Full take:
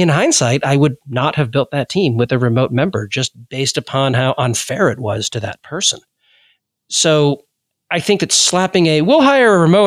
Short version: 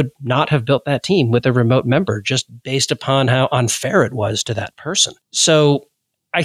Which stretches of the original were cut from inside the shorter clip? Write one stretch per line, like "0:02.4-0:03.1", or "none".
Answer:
0:06.1-0:06.8

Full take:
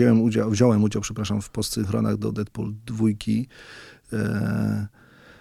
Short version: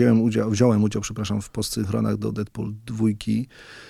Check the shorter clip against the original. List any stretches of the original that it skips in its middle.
none

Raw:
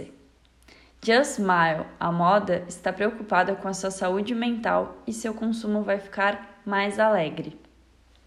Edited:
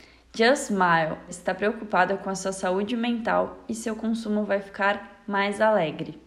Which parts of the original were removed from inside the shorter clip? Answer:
0:02.0-0:02.7

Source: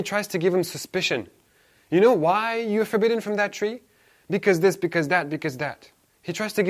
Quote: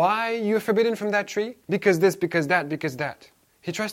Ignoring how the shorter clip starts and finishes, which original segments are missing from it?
0:03.9-0:04.2

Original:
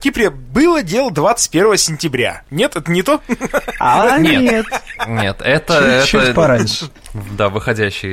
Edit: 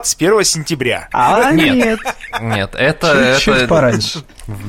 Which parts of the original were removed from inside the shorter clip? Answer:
0:02.4-0:03.8

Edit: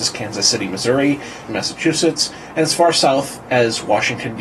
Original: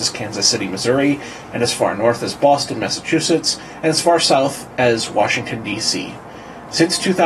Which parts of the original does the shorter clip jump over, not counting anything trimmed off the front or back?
0:01.5-0:02.7

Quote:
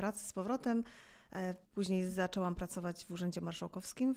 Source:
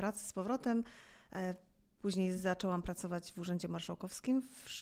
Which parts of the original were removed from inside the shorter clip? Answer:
0:01.6-0:01.9

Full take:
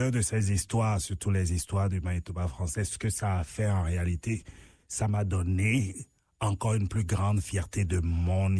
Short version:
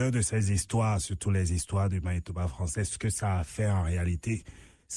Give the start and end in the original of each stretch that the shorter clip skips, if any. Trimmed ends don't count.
none

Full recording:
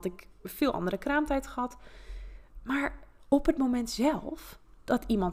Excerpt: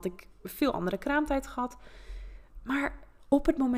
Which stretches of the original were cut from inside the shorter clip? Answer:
none

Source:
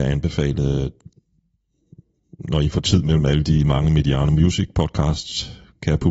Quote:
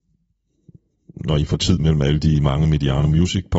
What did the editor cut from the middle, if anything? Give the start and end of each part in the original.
none

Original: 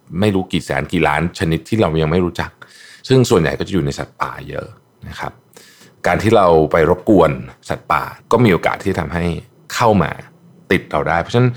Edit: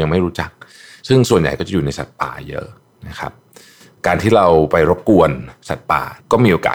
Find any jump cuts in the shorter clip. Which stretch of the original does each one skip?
none

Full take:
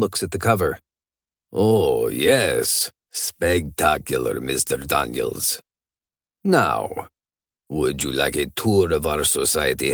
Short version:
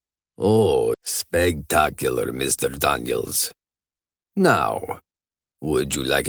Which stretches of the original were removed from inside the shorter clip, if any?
0:02.1-0:03.0

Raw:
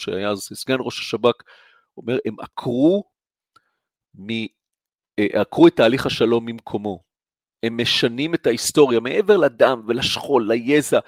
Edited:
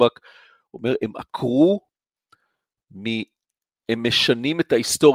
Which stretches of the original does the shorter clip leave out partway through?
0:05.0-0:07.5

